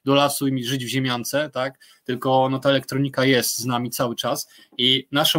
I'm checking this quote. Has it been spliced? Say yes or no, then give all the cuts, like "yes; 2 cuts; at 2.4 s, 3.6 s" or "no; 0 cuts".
no; 0 cuts